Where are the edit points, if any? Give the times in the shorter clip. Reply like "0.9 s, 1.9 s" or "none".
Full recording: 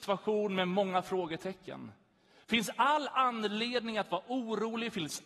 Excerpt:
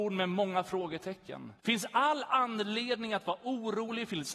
1.6 s